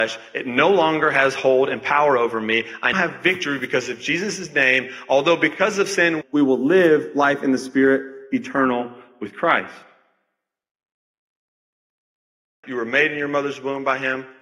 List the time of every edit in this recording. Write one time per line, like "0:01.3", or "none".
0:02.9
0:06.2
0:12.6